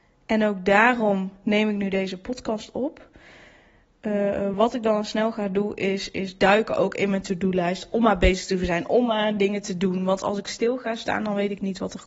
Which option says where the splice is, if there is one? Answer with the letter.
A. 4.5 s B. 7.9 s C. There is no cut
C